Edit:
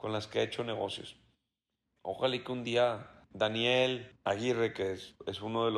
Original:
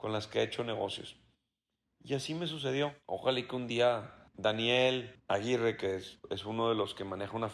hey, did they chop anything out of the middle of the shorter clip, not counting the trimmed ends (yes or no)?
yes